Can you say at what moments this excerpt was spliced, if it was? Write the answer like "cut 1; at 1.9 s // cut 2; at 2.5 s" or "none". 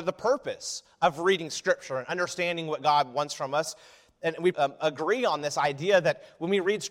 cut 1; at 4.5 s